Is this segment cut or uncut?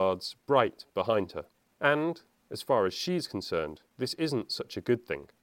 cut